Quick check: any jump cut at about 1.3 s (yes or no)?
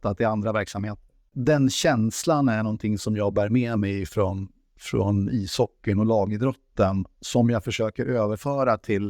yes